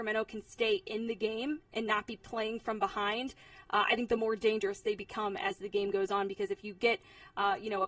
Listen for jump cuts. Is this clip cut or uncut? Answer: uncut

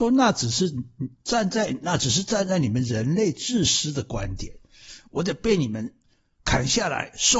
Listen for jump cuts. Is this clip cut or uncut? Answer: uncut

